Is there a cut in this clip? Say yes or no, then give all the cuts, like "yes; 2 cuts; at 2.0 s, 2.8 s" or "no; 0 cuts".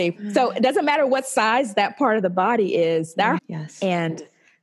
yes; 1 cut; at 3.4 s